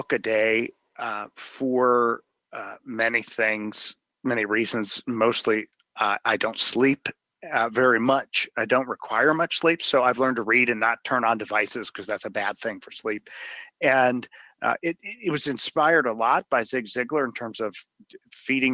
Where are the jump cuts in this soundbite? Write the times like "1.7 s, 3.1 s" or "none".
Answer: none